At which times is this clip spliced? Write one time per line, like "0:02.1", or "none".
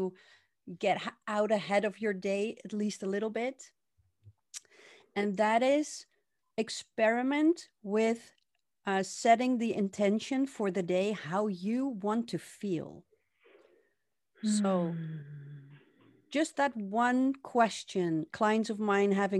0:18.3